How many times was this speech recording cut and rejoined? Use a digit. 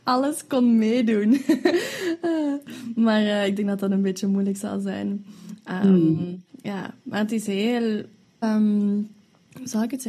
1